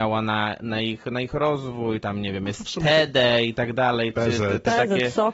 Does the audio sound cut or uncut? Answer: uncut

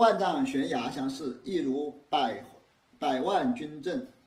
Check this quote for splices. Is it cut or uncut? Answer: uncut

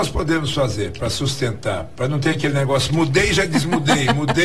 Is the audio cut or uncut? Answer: uncut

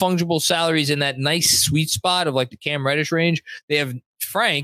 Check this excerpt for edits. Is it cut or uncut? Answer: uncut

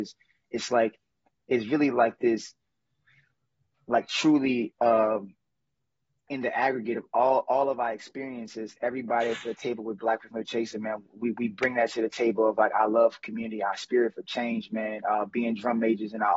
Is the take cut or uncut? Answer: cut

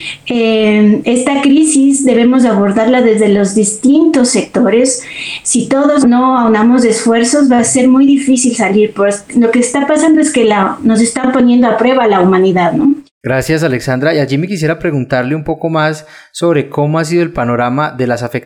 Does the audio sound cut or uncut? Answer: cut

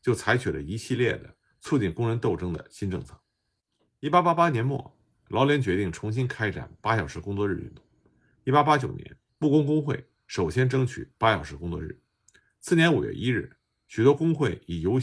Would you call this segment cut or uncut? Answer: cut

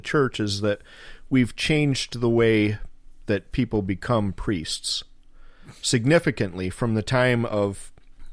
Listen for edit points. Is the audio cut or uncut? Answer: uncut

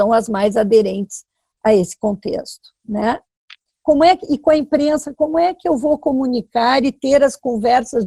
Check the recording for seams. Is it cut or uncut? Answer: cut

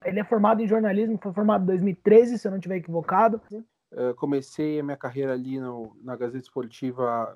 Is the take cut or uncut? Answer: cut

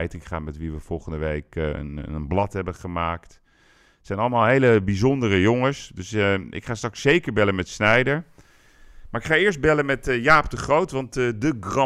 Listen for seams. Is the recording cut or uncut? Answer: uncut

